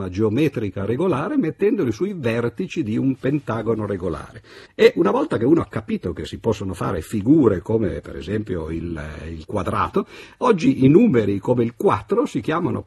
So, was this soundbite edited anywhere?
yes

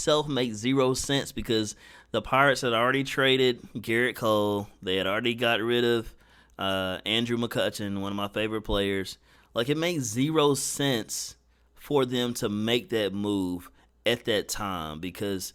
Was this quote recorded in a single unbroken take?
yes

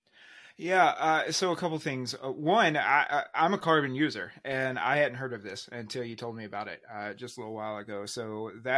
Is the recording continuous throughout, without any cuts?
yes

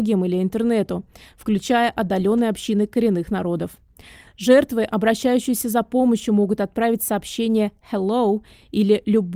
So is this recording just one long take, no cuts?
yes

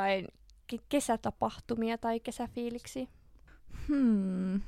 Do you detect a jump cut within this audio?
no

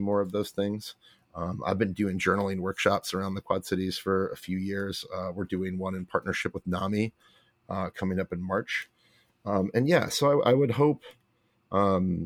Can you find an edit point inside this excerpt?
no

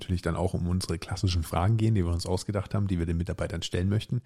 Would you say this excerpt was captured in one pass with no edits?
yes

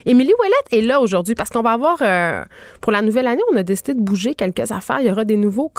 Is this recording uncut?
yes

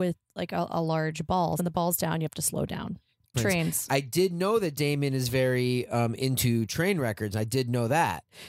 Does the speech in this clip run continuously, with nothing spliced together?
no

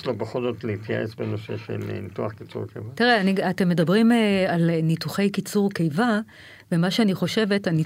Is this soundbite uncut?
yes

